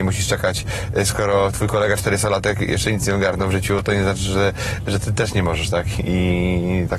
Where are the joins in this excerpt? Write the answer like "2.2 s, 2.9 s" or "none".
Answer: none